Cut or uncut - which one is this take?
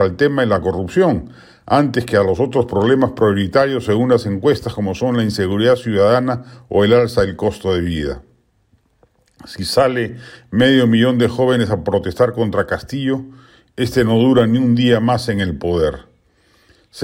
uncut